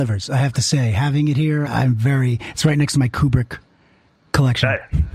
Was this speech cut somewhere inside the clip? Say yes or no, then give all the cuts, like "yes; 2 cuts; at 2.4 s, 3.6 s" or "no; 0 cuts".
yes; 1 cut; at 1.7 s